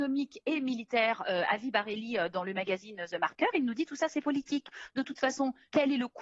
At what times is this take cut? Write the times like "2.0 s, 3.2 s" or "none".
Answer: none